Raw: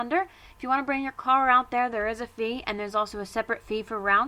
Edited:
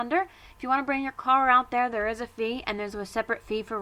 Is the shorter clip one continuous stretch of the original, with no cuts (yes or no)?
no